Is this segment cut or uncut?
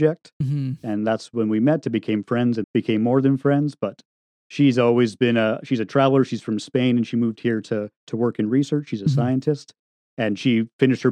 cut